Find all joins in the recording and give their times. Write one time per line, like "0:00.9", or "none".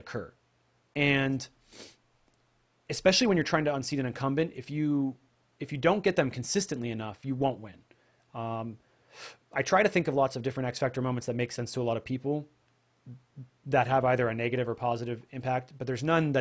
none